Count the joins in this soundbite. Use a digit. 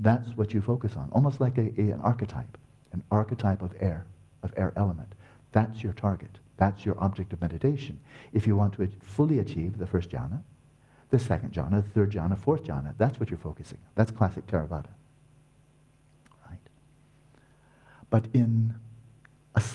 0